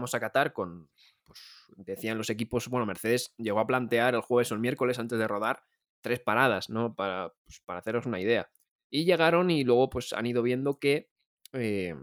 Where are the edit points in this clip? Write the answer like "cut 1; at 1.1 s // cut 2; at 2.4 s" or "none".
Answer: none